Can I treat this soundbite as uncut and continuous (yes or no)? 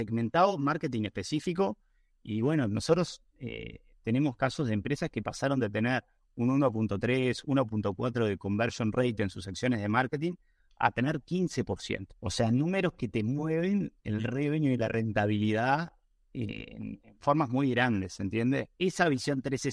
no